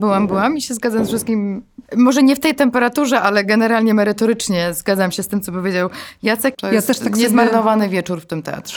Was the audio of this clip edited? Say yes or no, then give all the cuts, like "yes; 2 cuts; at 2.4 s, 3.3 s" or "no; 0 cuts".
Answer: yes; 2 cuts; at 1.9 s, 6.5 s